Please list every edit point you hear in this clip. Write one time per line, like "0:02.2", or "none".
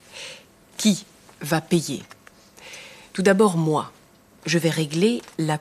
none